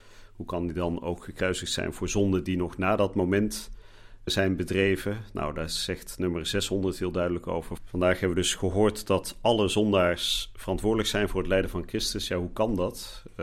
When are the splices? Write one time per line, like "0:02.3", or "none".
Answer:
0:04.3
0:07.8